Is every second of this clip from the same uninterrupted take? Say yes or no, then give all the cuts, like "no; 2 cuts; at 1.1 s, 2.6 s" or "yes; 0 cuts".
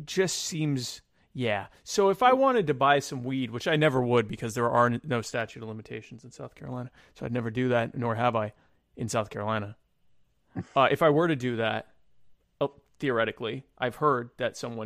yes; 0 cuts